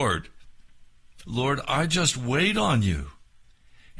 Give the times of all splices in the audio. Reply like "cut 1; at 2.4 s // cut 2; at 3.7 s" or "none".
cut 1; at 1.2 s